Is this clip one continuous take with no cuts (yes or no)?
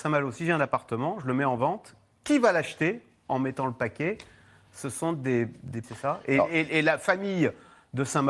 no